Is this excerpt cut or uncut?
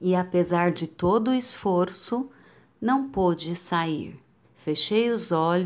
cut